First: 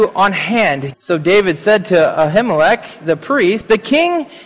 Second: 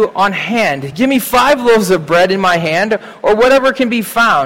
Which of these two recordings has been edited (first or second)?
first